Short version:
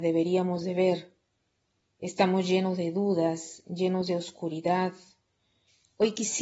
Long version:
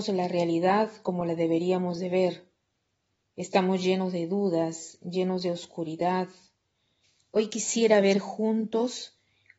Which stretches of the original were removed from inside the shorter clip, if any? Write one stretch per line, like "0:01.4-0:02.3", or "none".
none